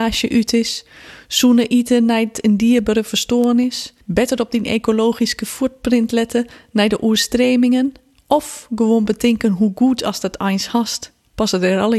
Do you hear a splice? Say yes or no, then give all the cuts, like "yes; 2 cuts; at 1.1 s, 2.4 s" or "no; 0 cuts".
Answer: yes; 1 cut; at 4.0 s